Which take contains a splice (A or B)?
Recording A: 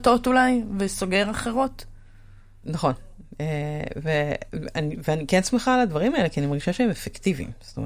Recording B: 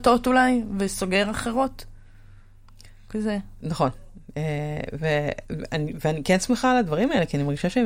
A